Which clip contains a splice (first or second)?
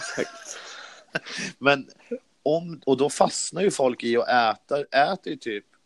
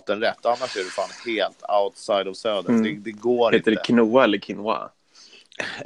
first